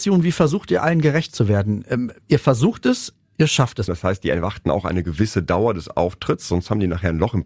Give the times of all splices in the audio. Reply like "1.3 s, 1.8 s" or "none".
3.9 s